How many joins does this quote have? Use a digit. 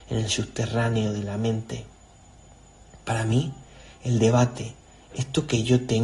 0